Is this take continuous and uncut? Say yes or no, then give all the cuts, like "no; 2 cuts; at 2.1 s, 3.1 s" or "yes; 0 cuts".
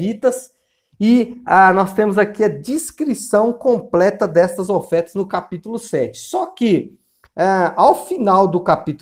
yes; 0 cuts